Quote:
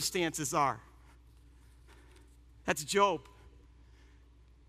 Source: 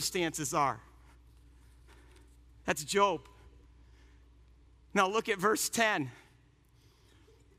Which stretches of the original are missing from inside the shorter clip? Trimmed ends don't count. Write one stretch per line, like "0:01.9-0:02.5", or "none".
none